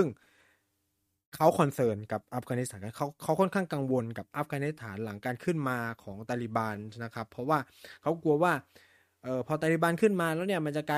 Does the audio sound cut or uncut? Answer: uncut